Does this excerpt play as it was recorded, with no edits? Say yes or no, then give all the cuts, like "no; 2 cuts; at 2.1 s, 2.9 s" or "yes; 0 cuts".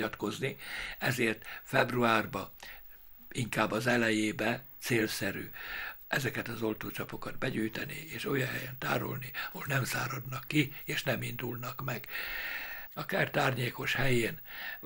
no; 1 cut; at 12.9 s